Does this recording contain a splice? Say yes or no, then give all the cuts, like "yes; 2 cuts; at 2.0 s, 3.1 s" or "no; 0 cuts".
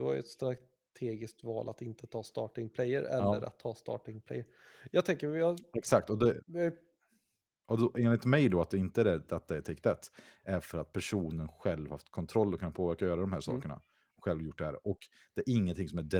no; 0 cuts